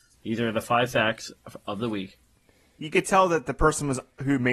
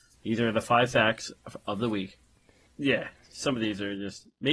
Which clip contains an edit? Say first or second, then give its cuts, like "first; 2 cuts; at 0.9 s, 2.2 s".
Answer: second; 1 cut; at 2.7 s